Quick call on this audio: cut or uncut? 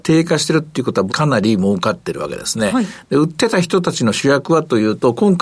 cut